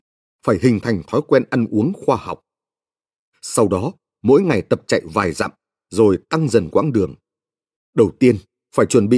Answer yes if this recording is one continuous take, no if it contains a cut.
no